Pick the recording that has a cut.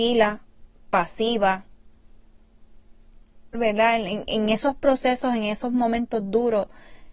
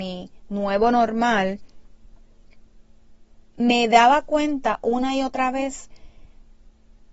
first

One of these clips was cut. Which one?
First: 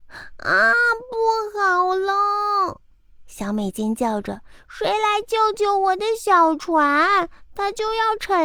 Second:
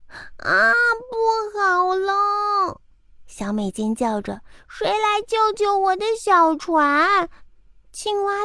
second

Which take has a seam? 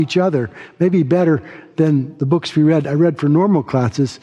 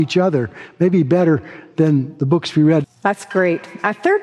second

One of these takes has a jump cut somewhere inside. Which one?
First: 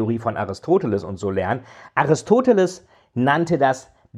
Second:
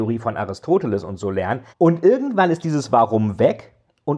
second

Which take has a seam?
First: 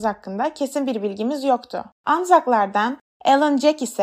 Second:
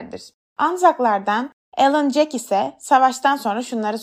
first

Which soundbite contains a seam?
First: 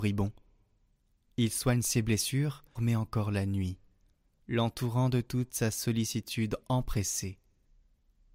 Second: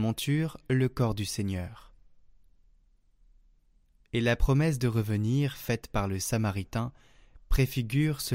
first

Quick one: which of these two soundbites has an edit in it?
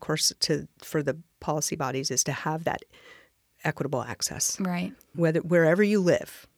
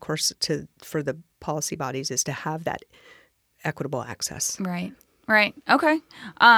first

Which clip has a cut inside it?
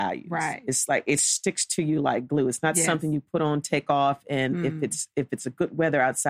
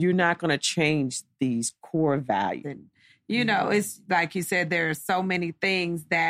second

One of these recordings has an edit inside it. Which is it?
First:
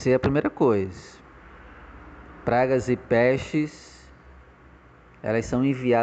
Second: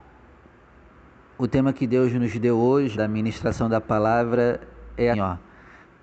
second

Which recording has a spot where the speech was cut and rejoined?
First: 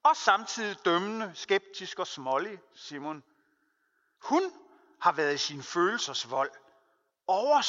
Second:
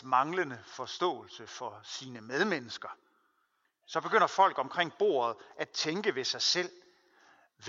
second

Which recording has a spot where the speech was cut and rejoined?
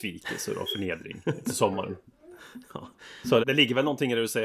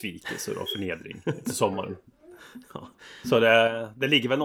first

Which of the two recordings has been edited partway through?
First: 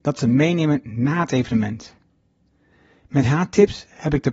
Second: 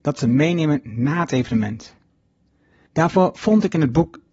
second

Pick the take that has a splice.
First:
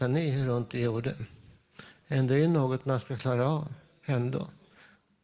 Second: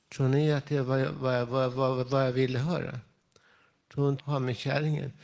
second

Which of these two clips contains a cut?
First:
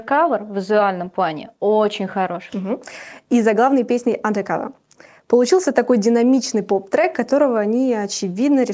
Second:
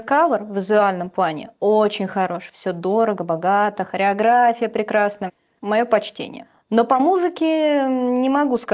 first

